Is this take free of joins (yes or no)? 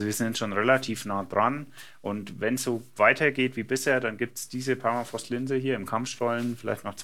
yes